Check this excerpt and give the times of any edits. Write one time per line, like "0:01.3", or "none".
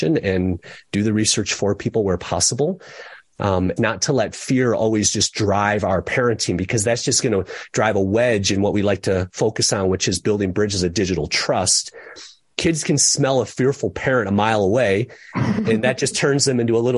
0:03.8

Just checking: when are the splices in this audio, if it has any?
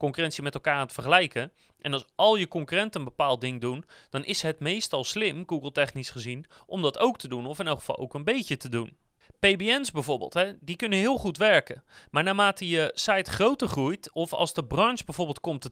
none

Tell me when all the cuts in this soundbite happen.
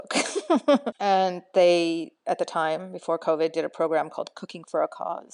0:00.9

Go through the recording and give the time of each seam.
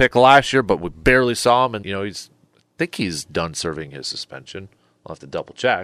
0:01.8

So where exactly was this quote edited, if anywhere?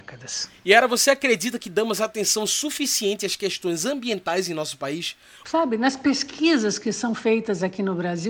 0:05.4

